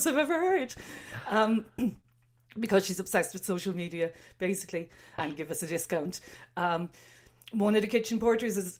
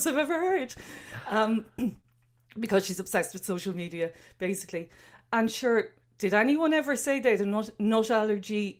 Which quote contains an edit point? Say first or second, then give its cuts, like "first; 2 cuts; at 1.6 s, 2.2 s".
first; 1 cut; at 5.2 s